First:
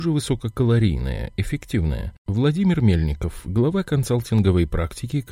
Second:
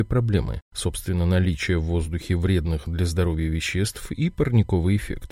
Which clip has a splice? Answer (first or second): first